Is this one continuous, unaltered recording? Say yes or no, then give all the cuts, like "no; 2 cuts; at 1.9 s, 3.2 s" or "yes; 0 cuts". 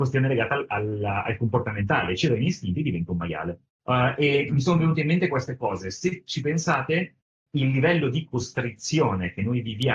yes; 0 cuts